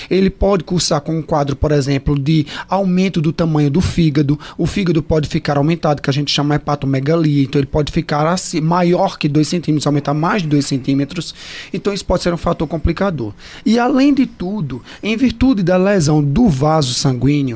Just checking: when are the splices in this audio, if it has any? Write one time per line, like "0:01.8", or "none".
none